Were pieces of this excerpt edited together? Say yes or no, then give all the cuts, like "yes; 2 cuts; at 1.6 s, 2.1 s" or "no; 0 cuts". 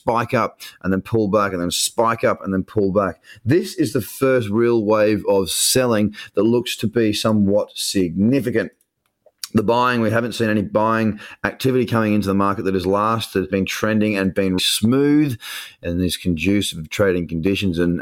yes; 2 cuts; at 13.5 s, 14.6 s